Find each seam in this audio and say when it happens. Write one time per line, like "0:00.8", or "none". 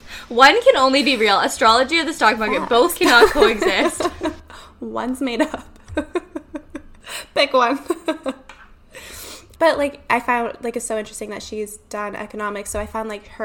0:09.6